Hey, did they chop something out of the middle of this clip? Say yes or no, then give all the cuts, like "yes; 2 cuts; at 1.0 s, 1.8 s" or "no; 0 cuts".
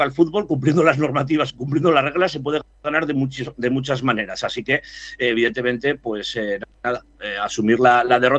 no; 0 cuts